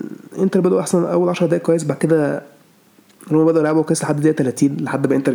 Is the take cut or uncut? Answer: uncut